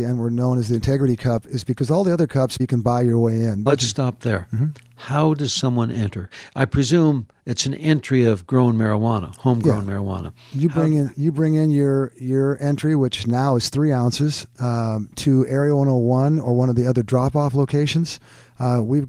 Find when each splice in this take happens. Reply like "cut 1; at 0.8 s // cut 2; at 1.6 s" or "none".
cut 1; at 2.6 s // cut 2; at 3.7 s